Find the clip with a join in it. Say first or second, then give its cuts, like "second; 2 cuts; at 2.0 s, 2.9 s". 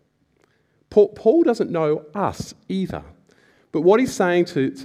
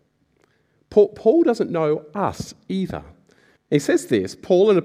second; 1 cut; at 3.6 s